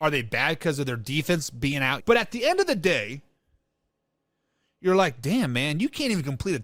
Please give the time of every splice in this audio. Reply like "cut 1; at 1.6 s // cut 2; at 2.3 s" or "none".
cut 1; at 2.0 s